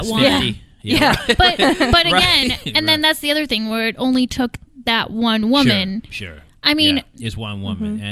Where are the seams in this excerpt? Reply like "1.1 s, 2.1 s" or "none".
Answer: 7.1 s